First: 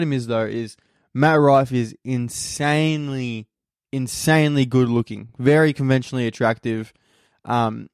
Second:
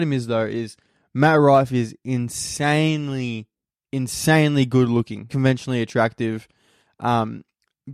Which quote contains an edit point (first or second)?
second